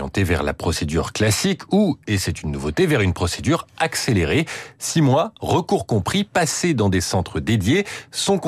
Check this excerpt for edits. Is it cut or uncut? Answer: uncut